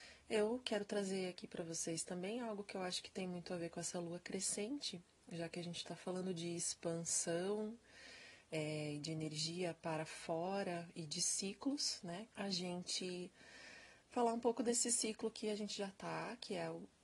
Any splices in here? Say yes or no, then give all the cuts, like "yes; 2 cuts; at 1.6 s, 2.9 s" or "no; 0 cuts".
yes; 1 cut; at 12.3 s